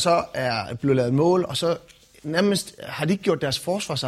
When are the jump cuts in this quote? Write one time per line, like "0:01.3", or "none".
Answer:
none